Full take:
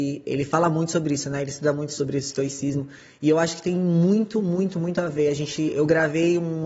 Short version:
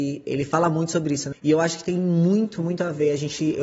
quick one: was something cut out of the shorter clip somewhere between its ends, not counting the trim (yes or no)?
yes